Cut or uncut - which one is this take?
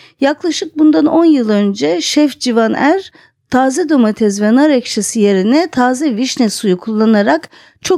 uncut